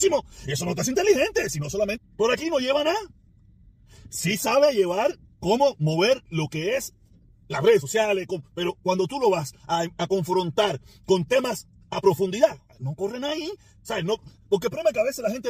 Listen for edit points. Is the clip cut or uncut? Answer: cut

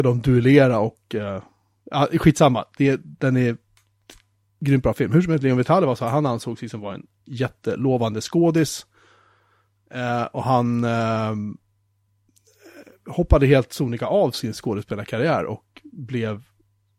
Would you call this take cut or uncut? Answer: uncut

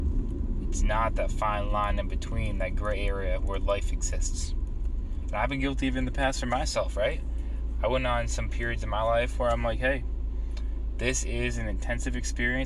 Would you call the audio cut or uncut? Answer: uncut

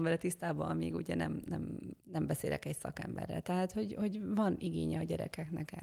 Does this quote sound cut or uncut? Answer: cut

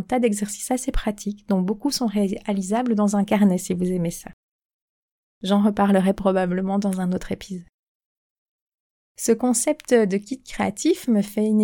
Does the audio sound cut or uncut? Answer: uncut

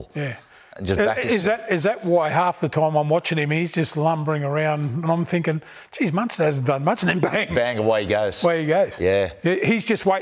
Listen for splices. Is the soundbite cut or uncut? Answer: uncut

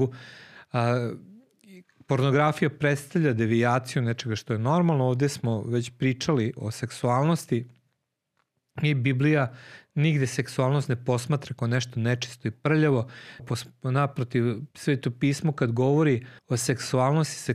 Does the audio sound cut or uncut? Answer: cut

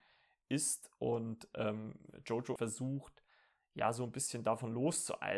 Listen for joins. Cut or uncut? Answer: cut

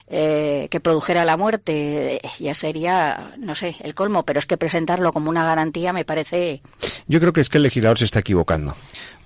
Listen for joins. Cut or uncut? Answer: uncut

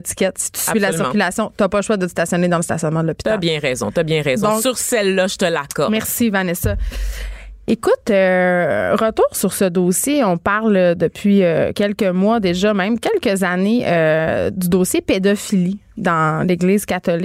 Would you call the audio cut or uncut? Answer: uncut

